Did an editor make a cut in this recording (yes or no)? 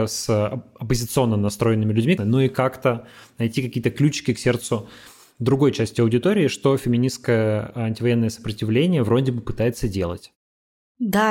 yes